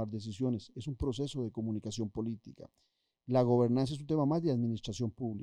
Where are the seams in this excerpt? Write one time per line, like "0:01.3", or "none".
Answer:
none